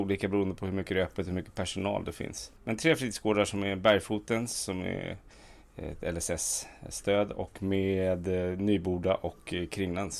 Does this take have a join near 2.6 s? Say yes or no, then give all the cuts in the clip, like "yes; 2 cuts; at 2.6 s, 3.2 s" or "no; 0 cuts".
yes; 1 cut; at 2.6 s